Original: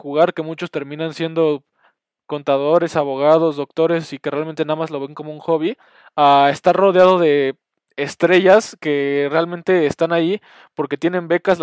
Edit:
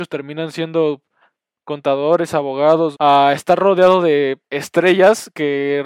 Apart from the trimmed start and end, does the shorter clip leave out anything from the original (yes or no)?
yes